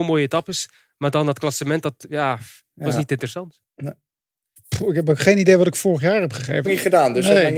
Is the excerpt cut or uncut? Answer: cut